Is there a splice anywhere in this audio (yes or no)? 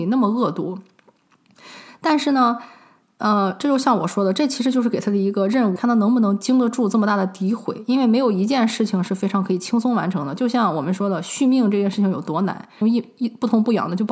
yes